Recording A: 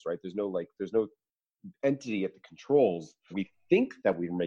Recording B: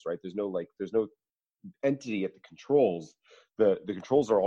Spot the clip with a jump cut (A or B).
A